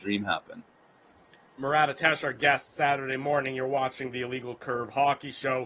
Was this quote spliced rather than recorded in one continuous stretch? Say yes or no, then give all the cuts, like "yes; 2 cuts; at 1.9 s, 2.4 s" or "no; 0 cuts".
no; 0 cuts